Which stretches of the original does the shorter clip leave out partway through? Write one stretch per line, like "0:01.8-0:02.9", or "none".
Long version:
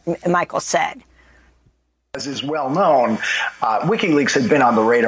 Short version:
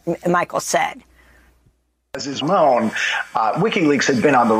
0:02.4-0:02.7